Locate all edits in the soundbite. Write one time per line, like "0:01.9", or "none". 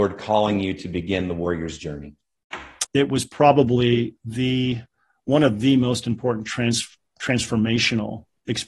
0:02.8